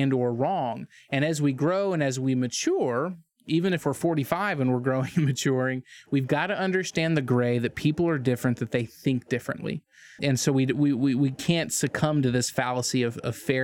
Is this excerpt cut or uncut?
cut